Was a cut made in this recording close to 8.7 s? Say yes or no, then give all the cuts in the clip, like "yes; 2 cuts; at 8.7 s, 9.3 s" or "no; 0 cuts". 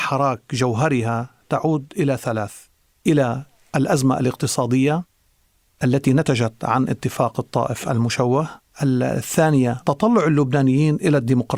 yes; 1 cut; at 8.7 s